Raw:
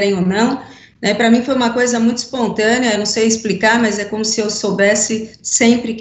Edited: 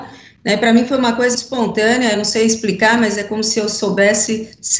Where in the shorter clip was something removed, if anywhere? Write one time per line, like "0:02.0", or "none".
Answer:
0:01.3